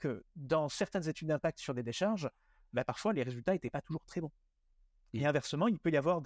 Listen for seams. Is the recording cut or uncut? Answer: uncut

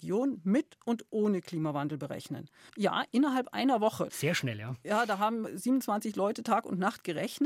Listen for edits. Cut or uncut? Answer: cut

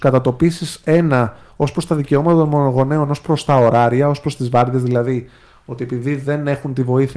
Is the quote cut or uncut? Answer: uncut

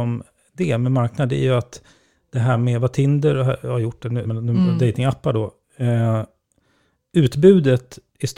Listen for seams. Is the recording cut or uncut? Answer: cut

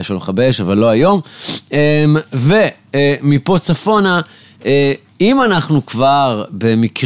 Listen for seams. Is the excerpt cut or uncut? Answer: uncut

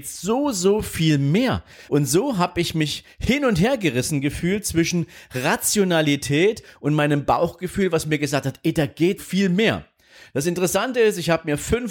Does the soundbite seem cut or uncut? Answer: cut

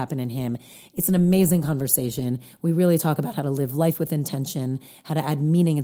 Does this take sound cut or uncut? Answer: uncut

